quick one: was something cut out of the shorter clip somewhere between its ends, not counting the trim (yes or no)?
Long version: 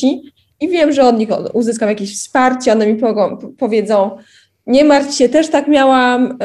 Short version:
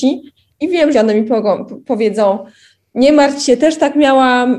yes